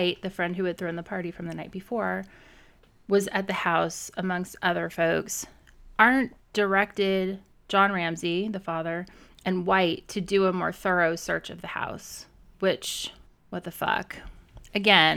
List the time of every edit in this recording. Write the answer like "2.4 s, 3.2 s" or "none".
none